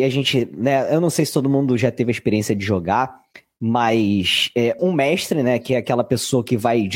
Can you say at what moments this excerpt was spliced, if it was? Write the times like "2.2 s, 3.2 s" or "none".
4.8 s